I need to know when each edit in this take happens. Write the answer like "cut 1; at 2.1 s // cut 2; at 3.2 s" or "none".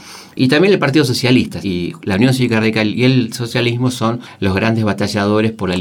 cut 1; at 1.6 s